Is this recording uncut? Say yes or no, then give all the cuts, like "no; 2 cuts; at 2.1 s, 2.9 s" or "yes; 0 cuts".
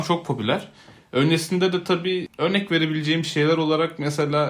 yes; 0 cuts